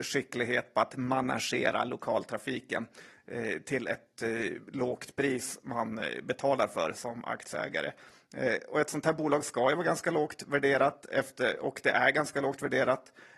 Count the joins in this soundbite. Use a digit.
0